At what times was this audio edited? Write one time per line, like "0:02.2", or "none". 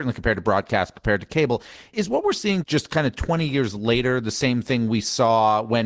0:00.9
0:02.6